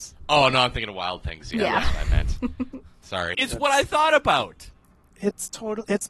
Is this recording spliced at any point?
yes; 1 cut; at 3.3 s

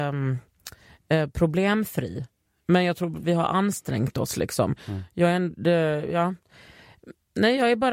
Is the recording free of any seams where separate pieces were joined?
yes; 0 cuts

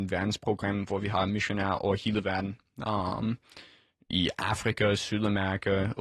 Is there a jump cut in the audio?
no; 0 cuts

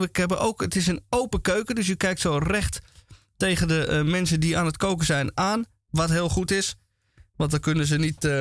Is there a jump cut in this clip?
no; 0 cuts

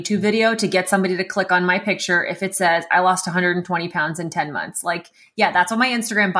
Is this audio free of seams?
yes; 0 cuts

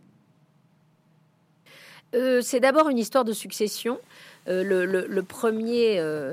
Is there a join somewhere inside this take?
no; 0 cuts

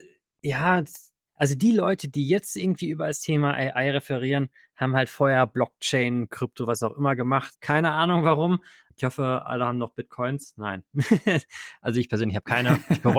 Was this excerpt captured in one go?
no; 1 cut; at 7.5 s

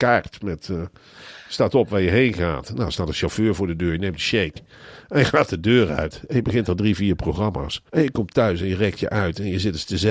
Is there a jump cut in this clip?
yes; 1 cut; at 7.9 s

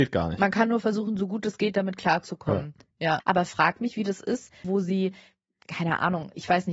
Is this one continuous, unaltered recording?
no; 2 cuts; at 3.2 s, 4.6 s

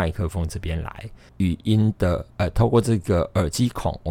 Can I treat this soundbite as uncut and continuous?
no; 1 cut; at 1.3 s

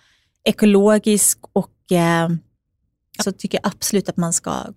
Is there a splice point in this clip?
yes; 1 cut; at 3.2 s

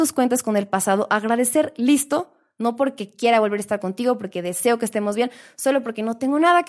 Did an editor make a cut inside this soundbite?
no; 0 cuts

